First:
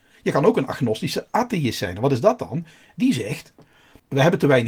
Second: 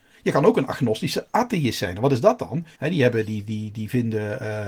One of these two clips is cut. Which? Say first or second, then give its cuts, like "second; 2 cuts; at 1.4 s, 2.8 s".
second; 1 cut; at 2.7 s